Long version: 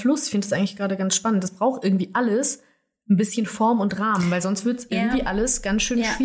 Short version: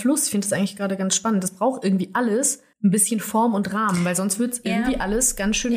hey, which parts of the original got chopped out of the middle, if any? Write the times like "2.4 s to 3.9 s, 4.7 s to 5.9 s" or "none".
2.7 s to 3.0 s